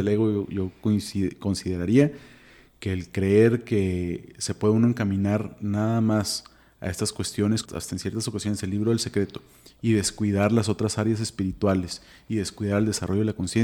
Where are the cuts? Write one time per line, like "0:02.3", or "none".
0:07.7